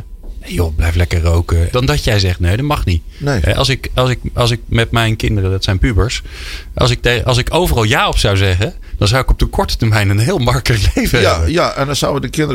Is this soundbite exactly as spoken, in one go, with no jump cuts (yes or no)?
no